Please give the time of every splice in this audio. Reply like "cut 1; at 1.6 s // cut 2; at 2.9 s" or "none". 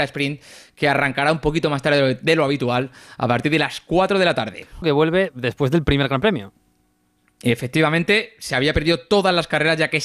cut 1; at 4.8 s